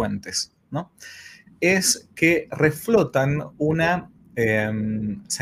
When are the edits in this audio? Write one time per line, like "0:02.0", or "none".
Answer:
0:01.5